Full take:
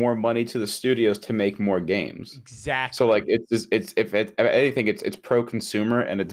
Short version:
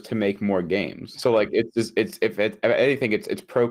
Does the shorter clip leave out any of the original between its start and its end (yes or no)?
yes